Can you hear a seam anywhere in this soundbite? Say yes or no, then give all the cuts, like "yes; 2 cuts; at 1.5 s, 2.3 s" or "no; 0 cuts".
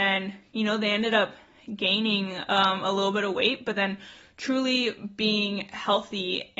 no; 0 cuts